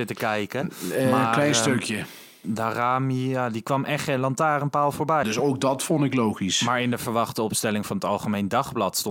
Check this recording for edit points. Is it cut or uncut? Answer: cut